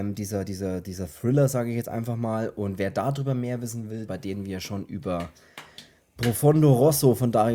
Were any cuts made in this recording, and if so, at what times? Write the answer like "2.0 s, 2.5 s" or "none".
4.1 s